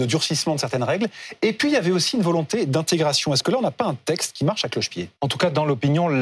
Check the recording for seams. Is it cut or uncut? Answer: cut